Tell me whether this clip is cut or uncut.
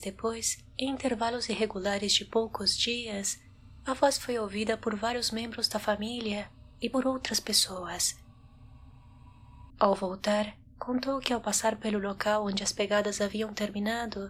cut